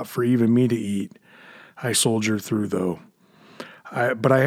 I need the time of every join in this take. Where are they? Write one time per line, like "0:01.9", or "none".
0:01.9